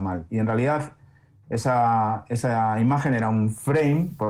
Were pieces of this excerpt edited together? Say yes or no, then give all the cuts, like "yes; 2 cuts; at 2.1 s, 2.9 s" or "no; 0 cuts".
no; 0 cuts